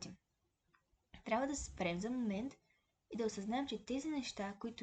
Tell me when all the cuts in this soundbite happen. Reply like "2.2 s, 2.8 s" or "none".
none